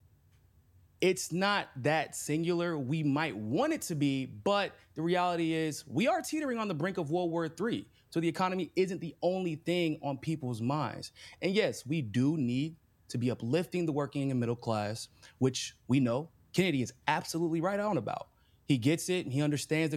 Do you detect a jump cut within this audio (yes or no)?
no